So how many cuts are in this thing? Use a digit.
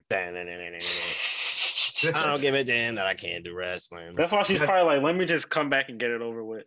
1